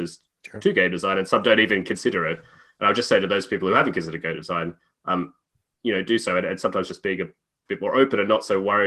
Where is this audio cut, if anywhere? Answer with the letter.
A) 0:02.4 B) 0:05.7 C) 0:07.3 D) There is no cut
D